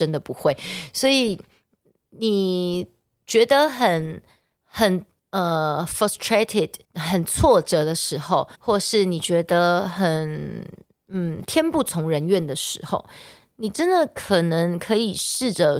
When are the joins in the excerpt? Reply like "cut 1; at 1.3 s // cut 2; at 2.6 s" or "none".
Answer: cut 1; at 6.8 s // cut 2; at 8.5 s